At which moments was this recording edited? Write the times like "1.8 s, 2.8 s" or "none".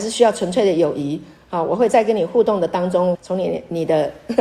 3.1 s